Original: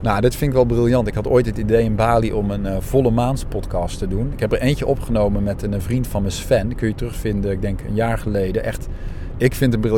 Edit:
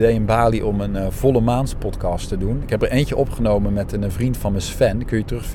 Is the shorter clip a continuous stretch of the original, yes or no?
yes